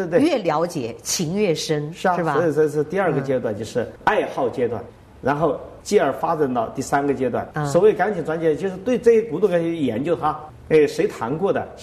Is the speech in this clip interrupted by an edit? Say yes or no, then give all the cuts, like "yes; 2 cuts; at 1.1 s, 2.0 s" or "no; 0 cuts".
yes; 1 cut; at 7.5 s